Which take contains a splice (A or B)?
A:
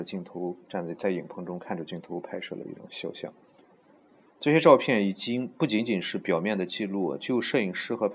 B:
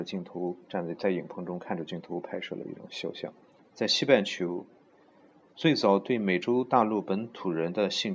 B